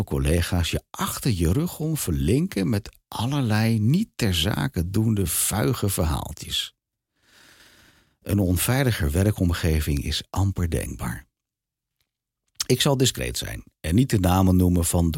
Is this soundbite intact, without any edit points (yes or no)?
yes